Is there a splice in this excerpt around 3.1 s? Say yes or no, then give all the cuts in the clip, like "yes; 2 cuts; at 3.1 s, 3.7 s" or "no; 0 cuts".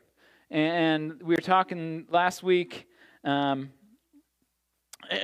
no; 0 cuts